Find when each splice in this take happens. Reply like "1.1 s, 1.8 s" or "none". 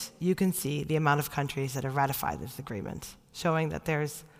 none